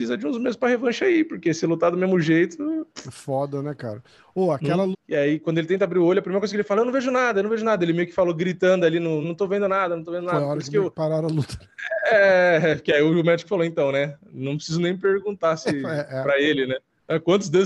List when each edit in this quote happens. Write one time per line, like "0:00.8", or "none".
0:04.9
0:09.2